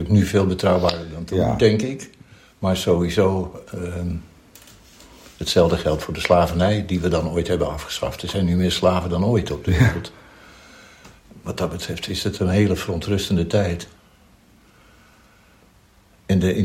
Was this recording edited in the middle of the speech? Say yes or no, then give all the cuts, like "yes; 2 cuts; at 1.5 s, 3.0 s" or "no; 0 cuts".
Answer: no; 0 cuts